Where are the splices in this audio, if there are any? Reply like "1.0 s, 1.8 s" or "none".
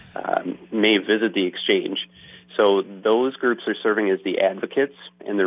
none